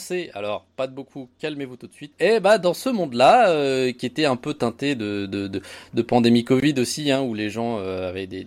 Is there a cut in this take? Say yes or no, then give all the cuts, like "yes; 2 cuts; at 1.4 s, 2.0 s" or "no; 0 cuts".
yes; 1 cut; at 2.1 s